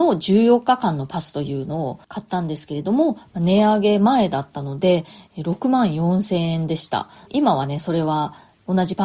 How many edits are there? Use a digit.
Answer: 1